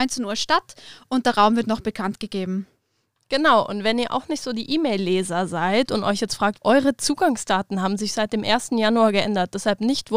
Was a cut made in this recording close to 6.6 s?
yes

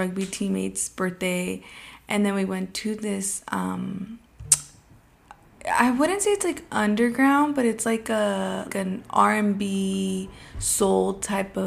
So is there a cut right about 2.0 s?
no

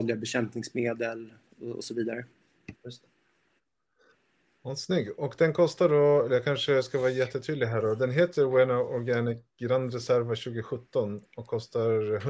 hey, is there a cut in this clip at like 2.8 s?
yes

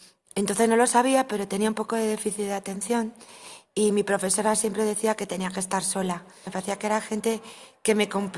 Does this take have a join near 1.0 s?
no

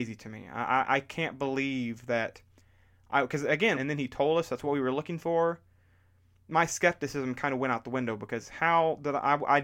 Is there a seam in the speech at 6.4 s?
no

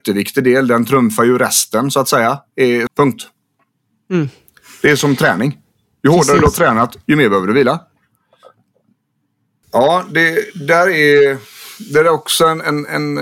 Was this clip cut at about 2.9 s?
yes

